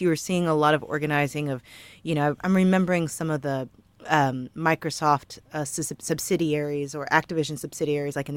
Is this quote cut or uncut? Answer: uncut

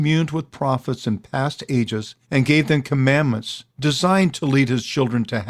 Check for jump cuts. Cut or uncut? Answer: cut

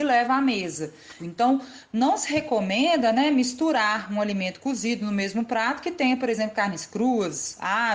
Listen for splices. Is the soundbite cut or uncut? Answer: cut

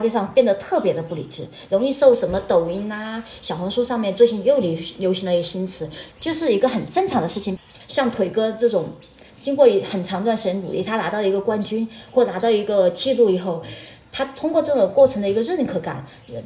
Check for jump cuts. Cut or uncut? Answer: cut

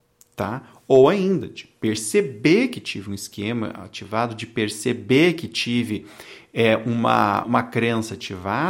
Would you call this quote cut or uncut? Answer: cut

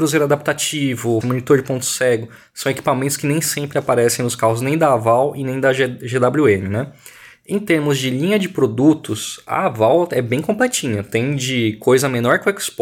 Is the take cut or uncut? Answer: cut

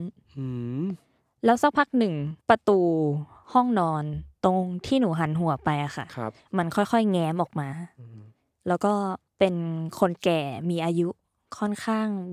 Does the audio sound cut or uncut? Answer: cut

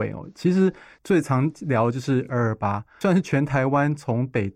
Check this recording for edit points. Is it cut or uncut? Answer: uncut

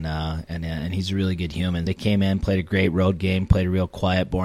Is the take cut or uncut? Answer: cut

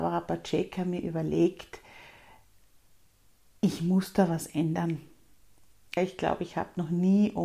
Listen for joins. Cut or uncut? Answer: cut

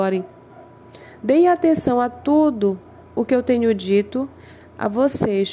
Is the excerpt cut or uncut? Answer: uncut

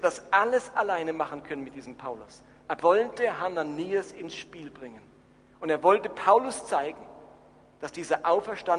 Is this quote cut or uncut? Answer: cut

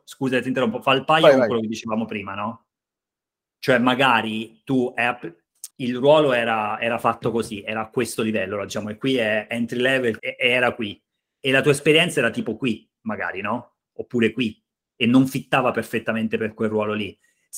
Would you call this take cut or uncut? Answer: cut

